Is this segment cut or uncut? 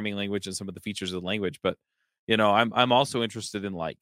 uncut